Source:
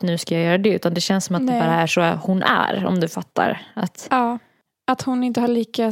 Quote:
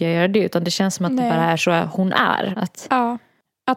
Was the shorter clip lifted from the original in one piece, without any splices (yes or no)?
no